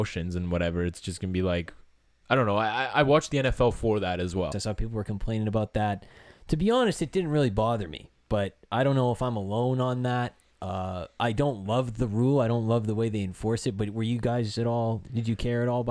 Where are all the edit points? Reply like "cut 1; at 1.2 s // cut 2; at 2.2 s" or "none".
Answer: cut 1; at 4.5 s